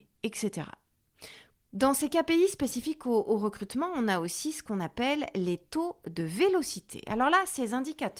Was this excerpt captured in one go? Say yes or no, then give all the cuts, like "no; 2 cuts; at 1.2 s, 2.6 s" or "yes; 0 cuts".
no; 1 cut; at 1.5 s